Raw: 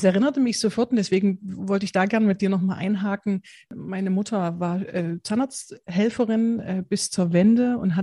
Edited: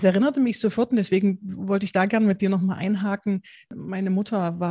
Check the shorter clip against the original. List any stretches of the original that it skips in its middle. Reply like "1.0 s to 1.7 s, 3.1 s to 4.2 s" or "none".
none